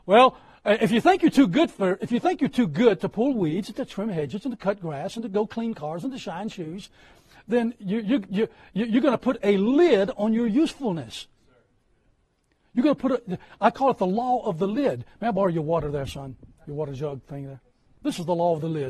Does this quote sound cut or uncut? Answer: uncut